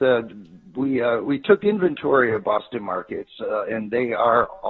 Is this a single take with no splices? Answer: no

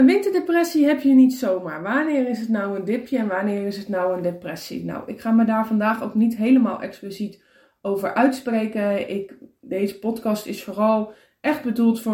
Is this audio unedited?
yes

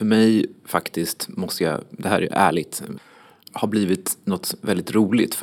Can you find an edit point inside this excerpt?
no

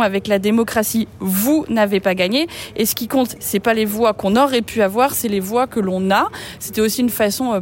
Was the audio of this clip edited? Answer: no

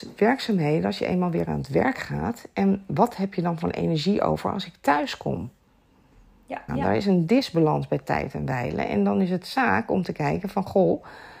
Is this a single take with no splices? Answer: no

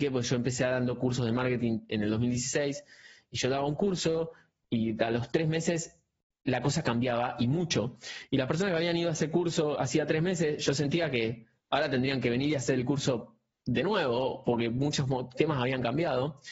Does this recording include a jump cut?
no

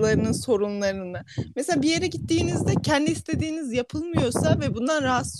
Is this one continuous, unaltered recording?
yes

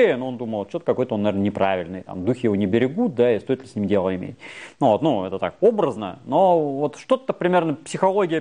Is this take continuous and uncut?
yes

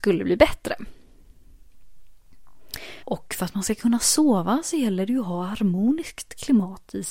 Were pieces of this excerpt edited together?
yes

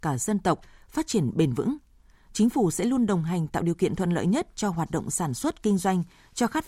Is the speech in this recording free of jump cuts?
yes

